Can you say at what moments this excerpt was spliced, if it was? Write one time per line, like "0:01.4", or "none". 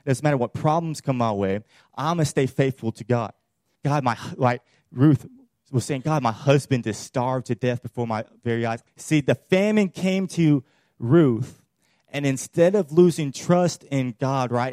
0:03.8
0:08.9